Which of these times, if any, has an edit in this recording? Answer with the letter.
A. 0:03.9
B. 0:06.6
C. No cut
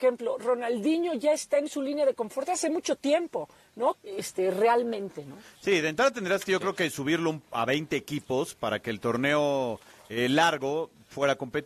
A